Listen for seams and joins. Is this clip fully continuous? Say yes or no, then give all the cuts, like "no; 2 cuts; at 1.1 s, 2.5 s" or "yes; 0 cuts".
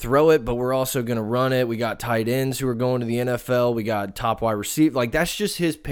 yes; 0 cuts